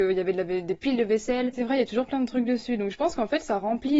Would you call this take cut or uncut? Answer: cut